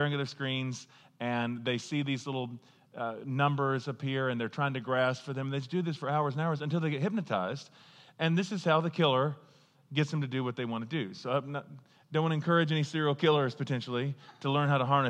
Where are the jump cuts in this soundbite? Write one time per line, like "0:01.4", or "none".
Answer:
none